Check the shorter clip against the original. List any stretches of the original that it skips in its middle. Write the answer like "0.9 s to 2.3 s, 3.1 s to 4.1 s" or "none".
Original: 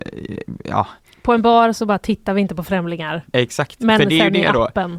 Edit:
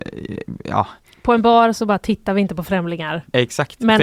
none

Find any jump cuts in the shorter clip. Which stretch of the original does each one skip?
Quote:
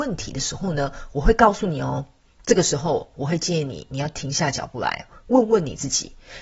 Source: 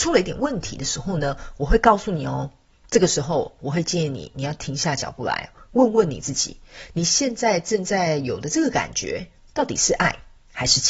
none

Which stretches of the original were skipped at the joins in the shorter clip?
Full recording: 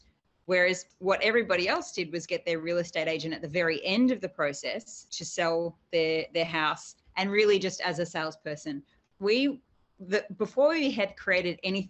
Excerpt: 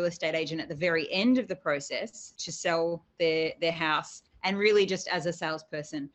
none

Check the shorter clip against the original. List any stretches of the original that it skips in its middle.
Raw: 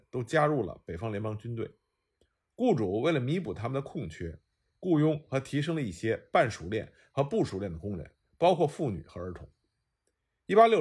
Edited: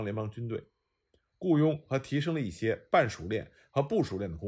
2.4 s to 4.7 s

